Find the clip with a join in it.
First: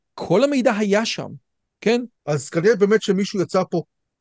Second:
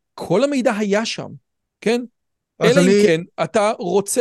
first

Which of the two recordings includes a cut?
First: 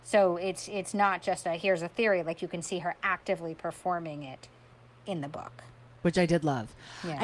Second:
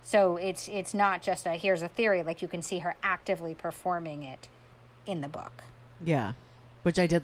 first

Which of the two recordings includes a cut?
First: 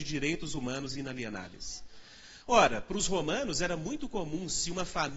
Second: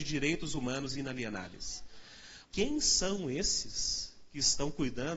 second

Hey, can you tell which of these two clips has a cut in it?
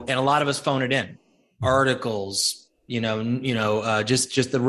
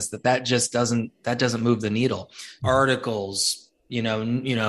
second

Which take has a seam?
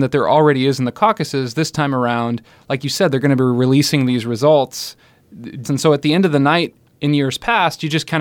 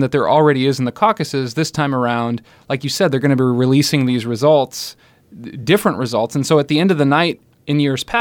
first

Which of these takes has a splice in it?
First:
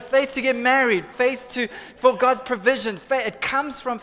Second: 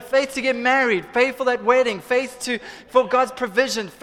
first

